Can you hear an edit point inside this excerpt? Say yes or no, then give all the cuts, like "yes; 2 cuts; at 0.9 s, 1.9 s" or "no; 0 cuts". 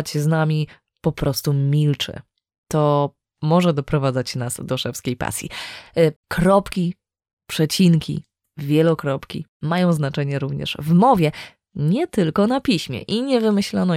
yes; 1 cut; at 6.2 s